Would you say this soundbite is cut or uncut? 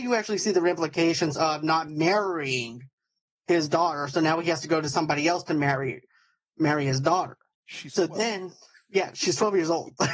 uncut